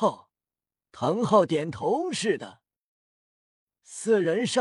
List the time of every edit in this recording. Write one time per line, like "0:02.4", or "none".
none